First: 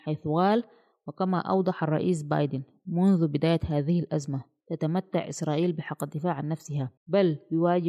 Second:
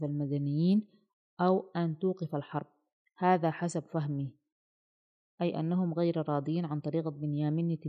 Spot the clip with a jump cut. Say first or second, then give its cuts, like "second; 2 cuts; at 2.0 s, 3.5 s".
first; 1 cut; at 7.0 s